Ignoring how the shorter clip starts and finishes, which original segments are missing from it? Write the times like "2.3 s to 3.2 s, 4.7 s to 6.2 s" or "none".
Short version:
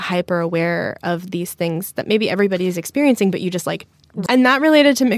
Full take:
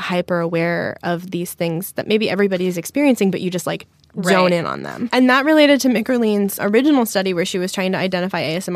4.3 s to 5.1 s